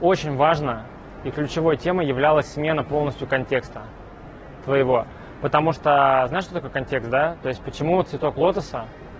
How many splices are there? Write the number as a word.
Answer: zero